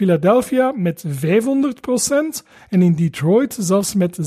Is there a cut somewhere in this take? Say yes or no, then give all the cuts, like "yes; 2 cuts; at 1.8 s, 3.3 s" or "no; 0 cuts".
no; 0 cuts